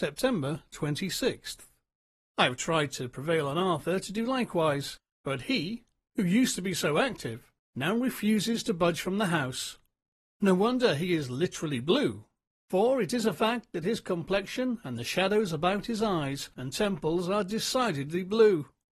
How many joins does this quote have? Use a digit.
1